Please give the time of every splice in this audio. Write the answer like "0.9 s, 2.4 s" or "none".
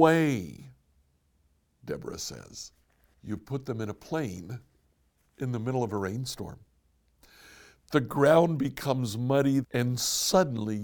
3.1 s, 9.6 s